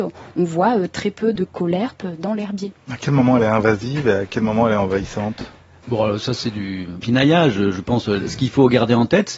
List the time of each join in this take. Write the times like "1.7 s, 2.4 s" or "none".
none